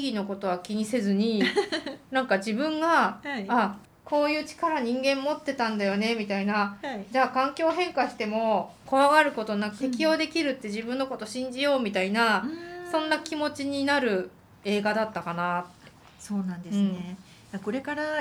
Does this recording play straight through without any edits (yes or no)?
no